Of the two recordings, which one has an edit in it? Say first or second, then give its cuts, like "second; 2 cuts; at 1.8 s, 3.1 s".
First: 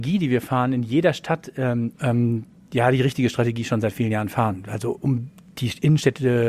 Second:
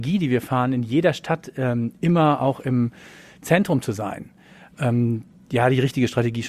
first; 1 cut; at 1.9 s